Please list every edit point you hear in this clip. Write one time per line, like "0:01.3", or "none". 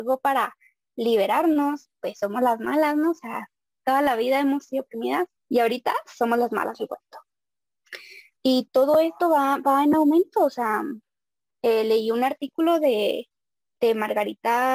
0:05.4
0:08.4

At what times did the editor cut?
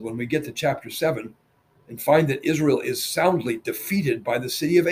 none

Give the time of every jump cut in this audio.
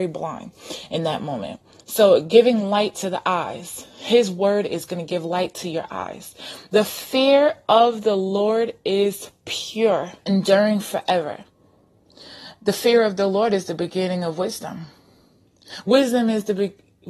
0:10.2

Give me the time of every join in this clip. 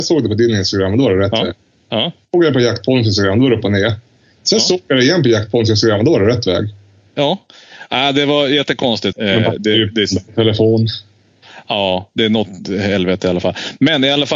0:09.1

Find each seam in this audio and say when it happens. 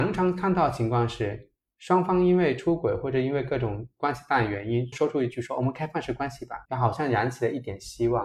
0:04.9
0:06.6

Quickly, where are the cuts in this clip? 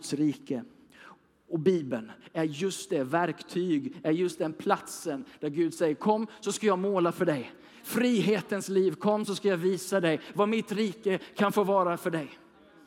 none

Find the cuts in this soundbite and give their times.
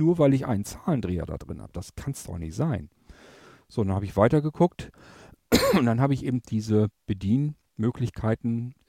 none

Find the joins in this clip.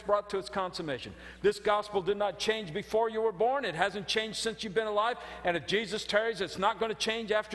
none

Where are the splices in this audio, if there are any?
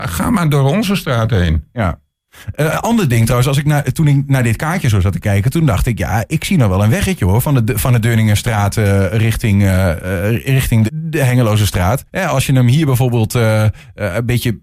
0:10.9
0:12.1

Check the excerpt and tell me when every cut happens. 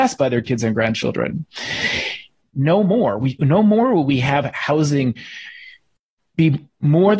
0:02.5

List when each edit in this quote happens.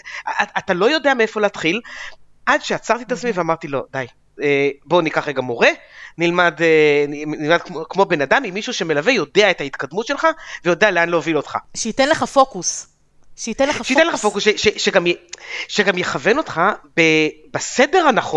none

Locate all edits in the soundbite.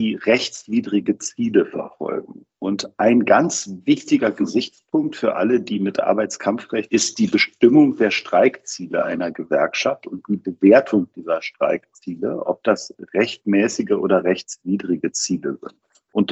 0:06.9

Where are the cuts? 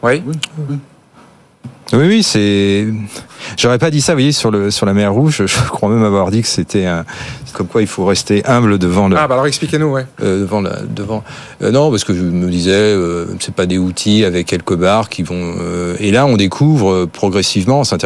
0:07.5

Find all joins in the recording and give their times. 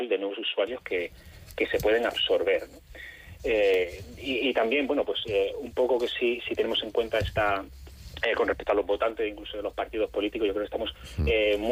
none

